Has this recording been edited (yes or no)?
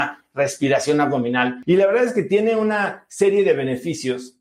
no